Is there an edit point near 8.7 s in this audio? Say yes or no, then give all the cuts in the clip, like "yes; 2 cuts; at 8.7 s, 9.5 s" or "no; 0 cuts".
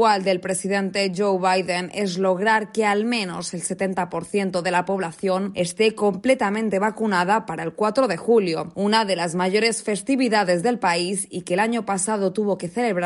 yes; 1 cut; at 8.7 s